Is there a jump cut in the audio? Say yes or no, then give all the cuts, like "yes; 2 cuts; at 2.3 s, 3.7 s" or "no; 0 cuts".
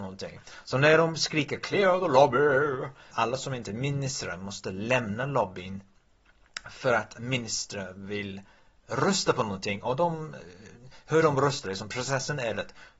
yes; 1 cut; at 3.1 s